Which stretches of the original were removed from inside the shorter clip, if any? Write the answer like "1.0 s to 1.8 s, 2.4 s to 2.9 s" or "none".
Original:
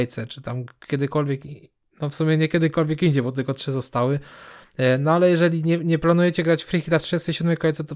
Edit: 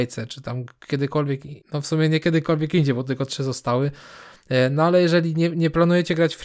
1.6 s to 1.9 s